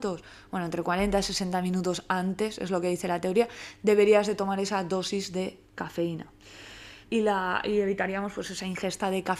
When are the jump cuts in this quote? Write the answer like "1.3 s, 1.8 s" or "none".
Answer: 7.0 s

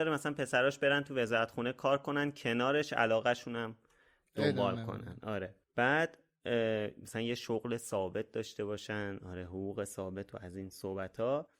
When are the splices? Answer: 5.6 s

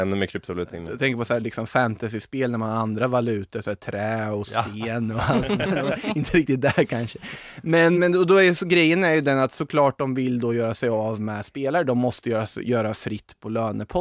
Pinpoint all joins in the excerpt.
7.9 s

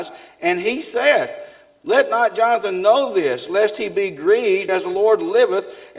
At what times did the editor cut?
4.7 s

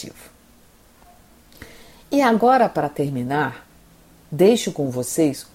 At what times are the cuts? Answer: none

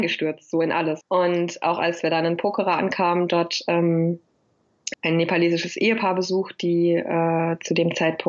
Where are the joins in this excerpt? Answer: 1.0 s, 4.9 s

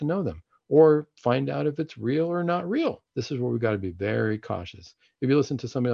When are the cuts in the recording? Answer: 3.1 s

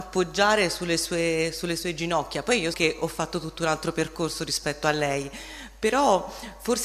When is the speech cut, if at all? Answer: 2.7 s

